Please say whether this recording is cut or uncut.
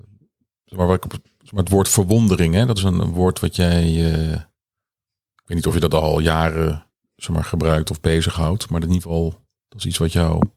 uncut